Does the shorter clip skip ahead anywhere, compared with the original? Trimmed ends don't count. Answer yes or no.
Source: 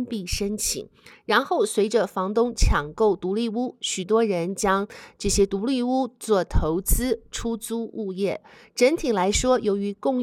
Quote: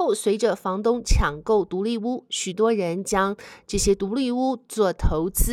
no